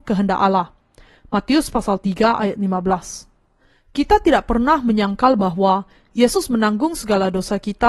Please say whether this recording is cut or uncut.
uncut